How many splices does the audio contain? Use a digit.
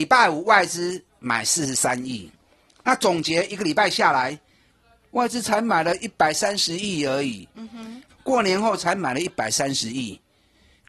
1